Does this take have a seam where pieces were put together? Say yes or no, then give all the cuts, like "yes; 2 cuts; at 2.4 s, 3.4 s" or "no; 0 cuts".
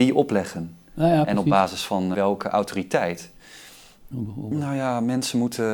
yes; 2 cuts; at 2.1 s, 4.1 s